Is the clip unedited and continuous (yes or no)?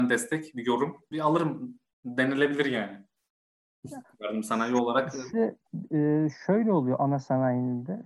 no